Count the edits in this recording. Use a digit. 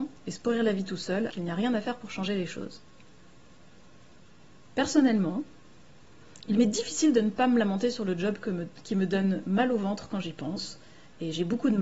1